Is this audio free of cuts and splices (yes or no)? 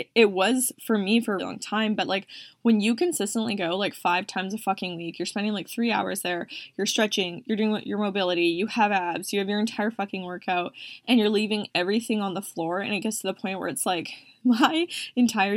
no